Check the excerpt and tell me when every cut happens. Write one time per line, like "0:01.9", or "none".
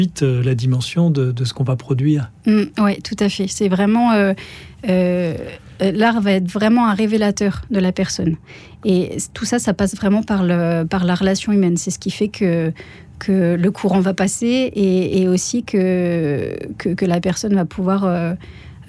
none